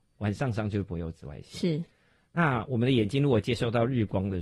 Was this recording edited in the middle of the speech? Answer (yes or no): no